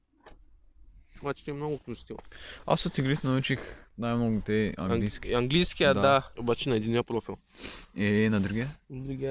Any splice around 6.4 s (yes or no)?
yes